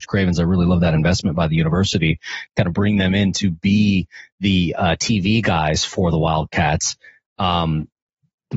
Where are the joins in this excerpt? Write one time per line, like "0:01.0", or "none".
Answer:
none